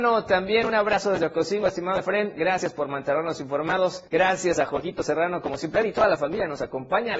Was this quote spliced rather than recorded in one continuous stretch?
yes; 1 cut; at 4.1 s

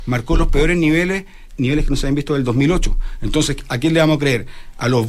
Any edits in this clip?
yes; 1 cut; at 1.5 s

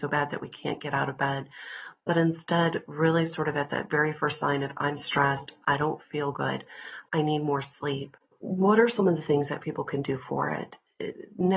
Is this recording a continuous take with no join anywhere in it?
yes; 0 cuts

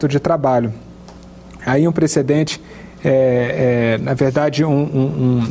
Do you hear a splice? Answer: yes; 1 cut; at 1.6 s

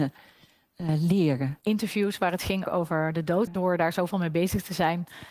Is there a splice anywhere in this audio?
yes; 1 cut; at 3.5 s

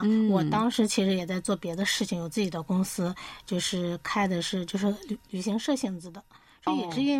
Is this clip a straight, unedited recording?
yes; 0 cuts

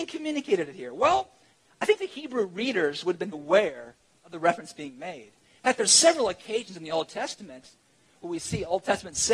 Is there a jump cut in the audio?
yes; 1 cut; at 3.3 s

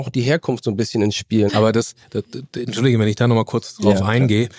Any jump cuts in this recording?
yes; 1 cut; at 1.5 s

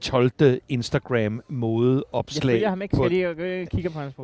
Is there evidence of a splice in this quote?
no; 0 cuts

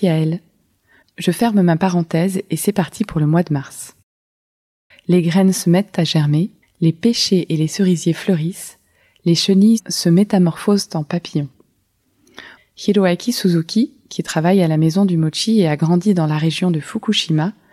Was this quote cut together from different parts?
yes; 3 cuts; at 4.9 s, 6.6 s, 12.6 s

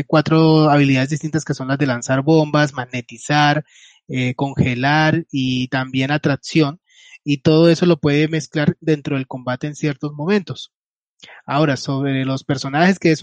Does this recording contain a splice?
no; 0 cuts

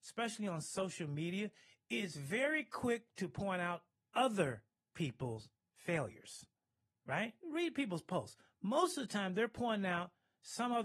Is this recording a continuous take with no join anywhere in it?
no; 1 cut; at 7.4 s

